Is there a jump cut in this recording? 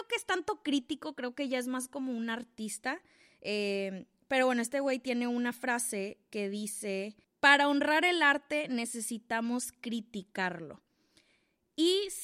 no; 0 cuts

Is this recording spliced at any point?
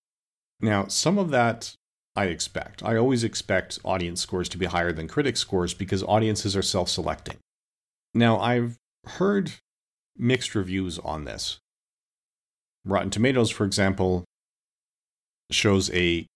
yes; 1 cut; at 8.0 s

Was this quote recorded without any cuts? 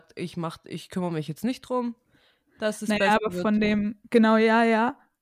yes; 0 cuts

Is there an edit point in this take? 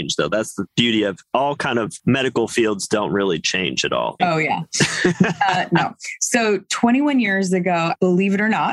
yes; 1 cut; at 4.2 s

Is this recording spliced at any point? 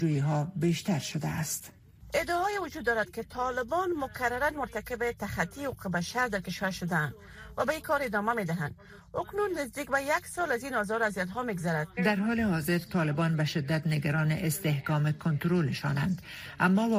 yes; 1 cut; at 12.0 s

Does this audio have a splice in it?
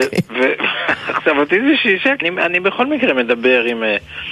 yes; 1 cut; at 2.2 s

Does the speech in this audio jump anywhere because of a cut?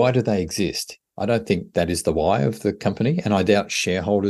yes; 1 cut; at 1.0 s

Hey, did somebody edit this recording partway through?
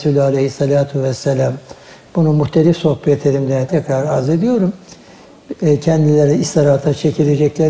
yes; 1 cut; at 3.7 s

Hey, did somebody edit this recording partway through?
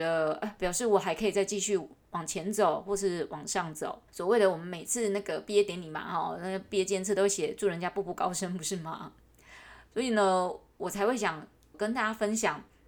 yes; 2 cuts; at 4.1 s, 11.7 s

